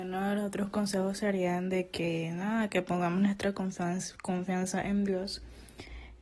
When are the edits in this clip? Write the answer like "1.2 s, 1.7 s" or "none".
none